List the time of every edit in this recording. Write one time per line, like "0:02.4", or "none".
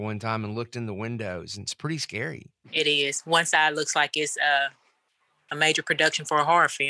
0:02.6